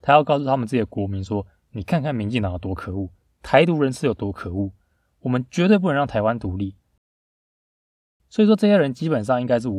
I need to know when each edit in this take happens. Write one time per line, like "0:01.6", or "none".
none

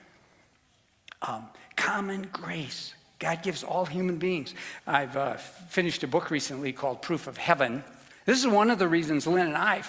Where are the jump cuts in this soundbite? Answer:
0:04.8
0:08.1

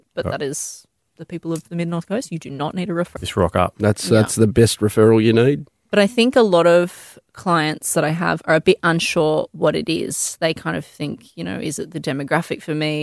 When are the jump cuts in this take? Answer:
0:03.2

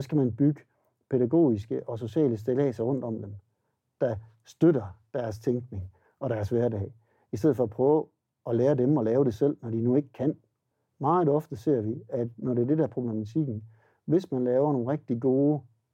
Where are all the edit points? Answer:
0:10.9

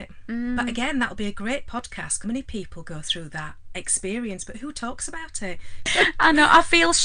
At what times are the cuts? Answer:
0:02.2
0:05.9

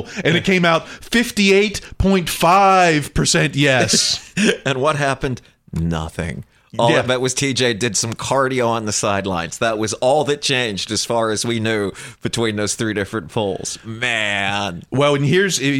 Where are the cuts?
none

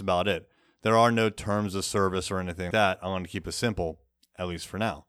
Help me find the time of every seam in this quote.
0:02.7

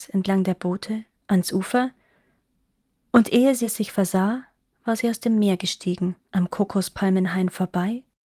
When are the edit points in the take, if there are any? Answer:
0:06.2

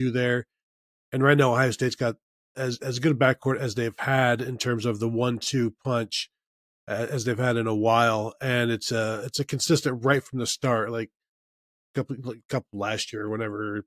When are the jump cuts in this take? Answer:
none

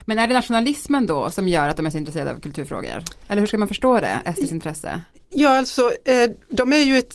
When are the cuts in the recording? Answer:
none

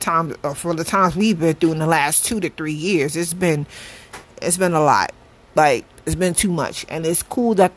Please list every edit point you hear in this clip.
none

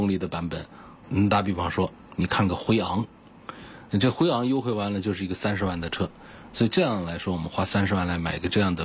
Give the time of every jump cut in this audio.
0:01.0
0:06.5

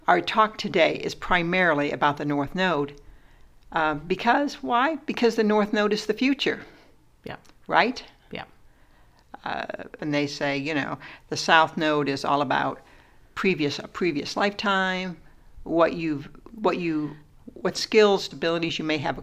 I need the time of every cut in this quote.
0:10.0
0:18.3

